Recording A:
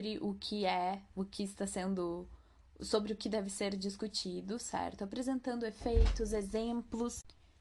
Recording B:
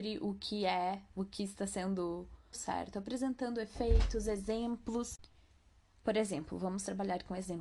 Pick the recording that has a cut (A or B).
B